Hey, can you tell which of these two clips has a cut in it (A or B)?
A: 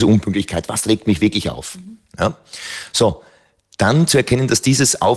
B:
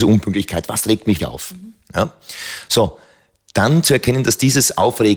B